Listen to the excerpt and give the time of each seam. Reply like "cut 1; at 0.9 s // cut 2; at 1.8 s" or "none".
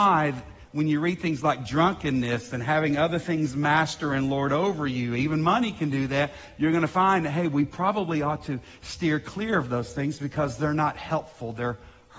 none